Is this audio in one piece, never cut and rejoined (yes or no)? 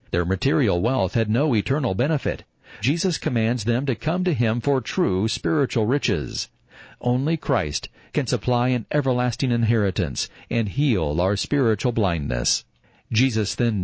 no